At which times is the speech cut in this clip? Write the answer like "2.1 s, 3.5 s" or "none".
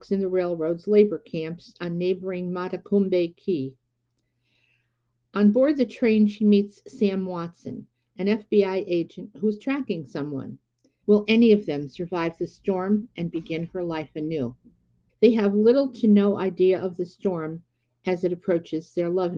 11.0 s, 15.1 s